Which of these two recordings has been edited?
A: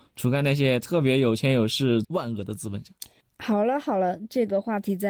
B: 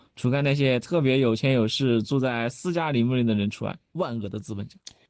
A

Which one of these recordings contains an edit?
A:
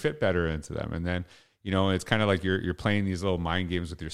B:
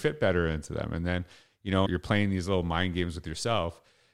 B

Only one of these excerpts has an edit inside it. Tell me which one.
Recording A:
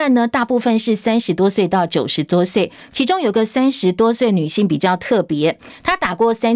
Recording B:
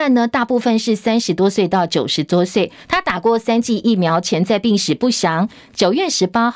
B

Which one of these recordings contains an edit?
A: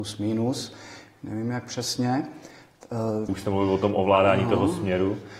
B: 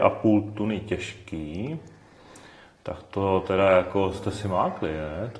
A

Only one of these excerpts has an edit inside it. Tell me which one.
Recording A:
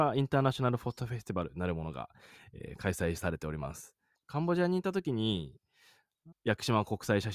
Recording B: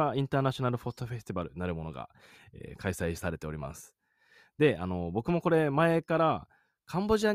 A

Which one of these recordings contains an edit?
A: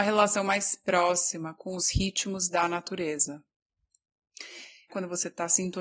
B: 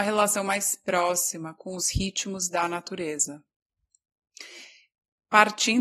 A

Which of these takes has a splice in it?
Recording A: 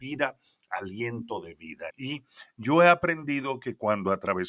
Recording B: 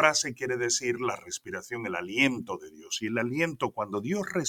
A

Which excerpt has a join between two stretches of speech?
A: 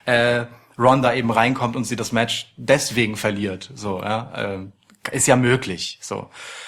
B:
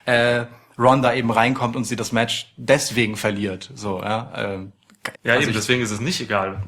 B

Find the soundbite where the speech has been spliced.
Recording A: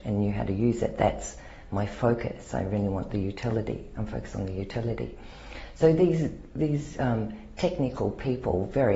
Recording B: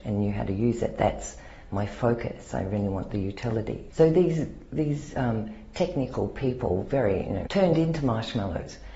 B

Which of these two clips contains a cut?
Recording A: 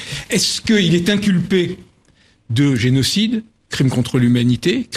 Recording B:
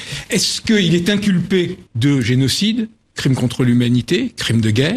B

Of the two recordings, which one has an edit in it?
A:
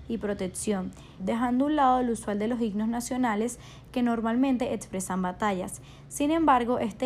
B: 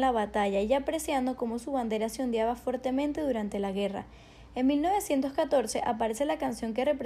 A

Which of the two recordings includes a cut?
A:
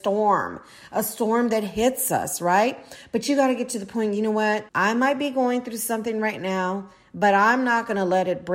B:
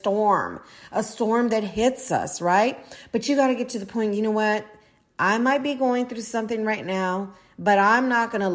A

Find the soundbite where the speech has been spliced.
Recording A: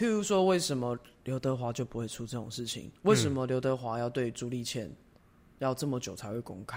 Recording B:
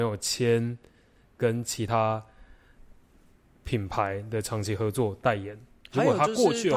A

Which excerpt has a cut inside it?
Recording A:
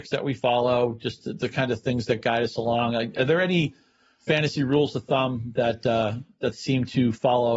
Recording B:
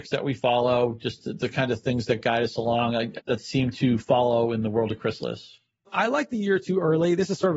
B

